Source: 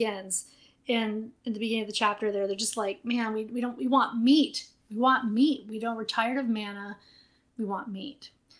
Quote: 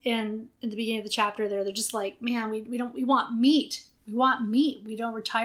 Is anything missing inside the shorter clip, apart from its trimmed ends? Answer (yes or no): no